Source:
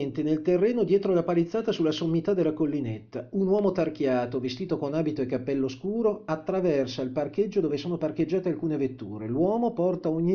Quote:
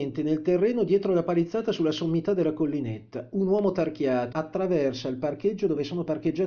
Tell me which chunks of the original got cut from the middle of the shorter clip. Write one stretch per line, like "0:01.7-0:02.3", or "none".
0:04.3-0:06.2